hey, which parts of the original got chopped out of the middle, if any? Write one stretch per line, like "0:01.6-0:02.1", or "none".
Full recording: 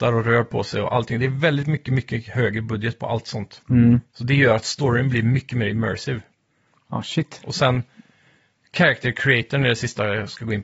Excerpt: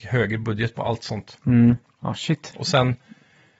0:04.1-0:06.7